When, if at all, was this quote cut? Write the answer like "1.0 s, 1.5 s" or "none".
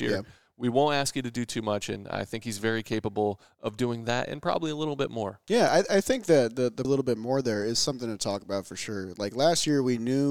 6.8 s